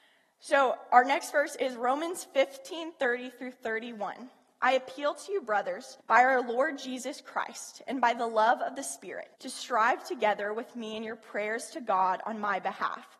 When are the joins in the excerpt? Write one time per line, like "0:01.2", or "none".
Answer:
0:06.0
0:09.3